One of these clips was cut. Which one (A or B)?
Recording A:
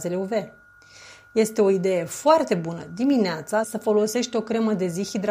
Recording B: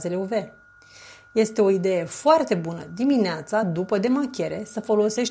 A